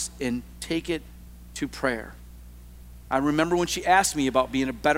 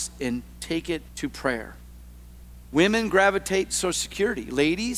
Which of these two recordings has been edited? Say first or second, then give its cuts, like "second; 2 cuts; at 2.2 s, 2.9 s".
second; 2 cuts; at 1.1 s, 2.7 s